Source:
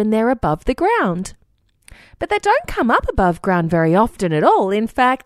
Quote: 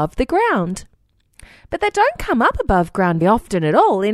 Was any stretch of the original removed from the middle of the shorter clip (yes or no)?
yes